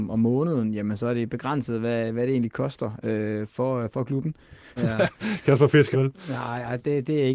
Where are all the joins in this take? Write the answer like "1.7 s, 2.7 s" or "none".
4.8 s, 5.9 s